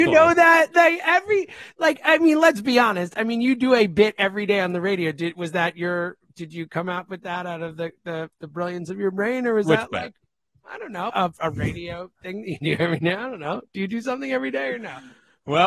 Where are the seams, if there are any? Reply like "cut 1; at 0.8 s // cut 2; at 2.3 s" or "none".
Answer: cut 1; at 11.1 s